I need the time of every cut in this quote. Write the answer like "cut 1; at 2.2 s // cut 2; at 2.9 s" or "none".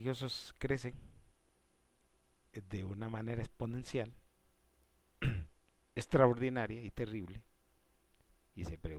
none